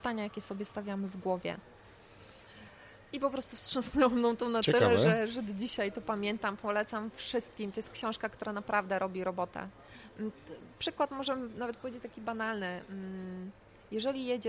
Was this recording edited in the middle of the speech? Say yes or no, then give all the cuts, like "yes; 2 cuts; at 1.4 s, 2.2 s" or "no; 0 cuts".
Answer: no; 0 cuts